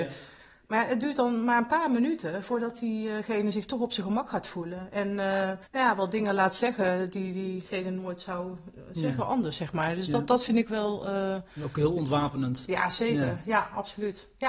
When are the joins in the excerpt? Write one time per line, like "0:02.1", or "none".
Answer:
0:05.6